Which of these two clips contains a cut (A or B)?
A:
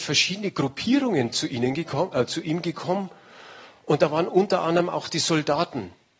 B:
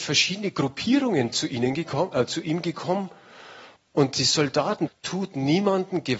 B